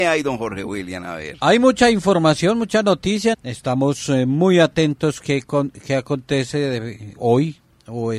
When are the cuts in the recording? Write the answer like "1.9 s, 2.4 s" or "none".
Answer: 3.3 s